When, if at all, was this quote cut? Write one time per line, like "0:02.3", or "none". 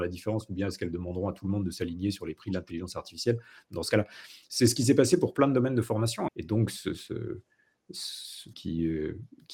0:06.3
0:08.5